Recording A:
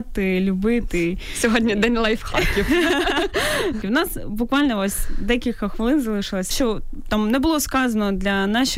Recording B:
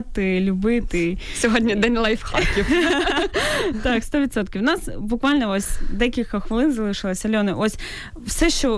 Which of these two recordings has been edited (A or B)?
A